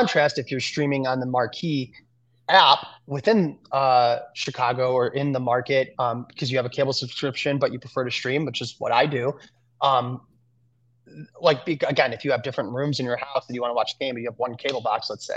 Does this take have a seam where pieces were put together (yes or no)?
no